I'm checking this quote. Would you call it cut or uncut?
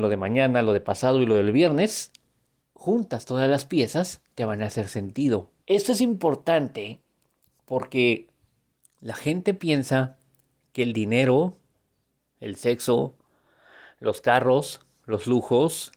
cut